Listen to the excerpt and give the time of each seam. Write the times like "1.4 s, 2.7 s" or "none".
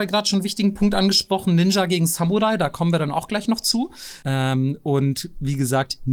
4.2 s